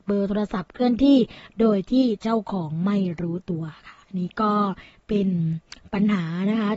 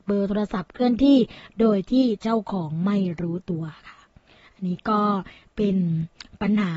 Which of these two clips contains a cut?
first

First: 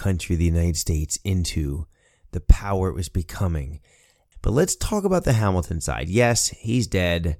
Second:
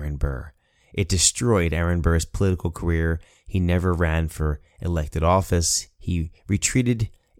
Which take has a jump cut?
first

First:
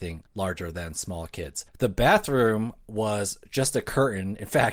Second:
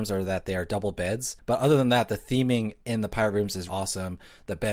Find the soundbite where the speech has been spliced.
second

